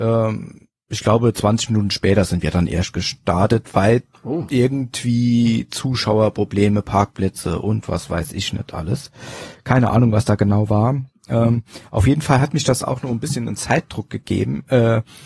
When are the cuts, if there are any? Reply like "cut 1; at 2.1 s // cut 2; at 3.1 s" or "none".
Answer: none